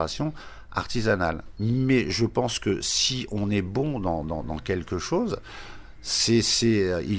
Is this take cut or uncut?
cut